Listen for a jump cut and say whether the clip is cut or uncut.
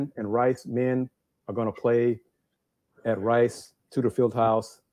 uncut